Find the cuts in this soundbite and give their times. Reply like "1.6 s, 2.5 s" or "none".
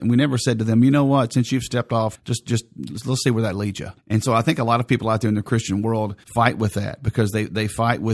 2.1 s, 4.0 s, 6.2 s

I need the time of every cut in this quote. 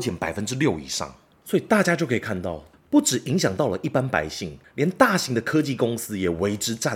2.7 s

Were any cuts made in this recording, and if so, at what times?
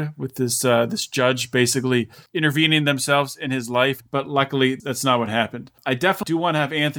4.0 s

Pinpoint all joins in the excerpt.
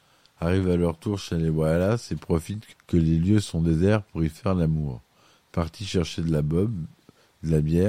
2.7 s

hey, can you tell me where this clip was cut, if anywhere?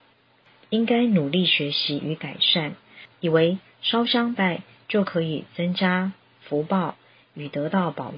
3.1 s, 4.3 s

